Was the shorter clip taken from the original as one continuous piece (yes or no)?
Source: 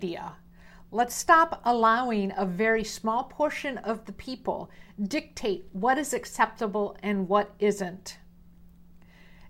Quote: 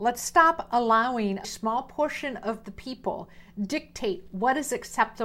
no